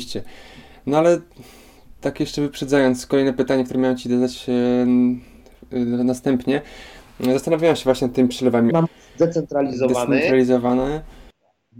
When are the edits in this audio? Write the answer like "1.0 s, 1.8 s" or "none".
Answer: 8.7 s